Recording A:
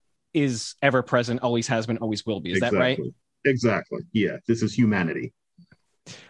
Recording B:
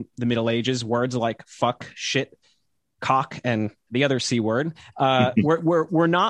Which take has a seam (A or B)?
B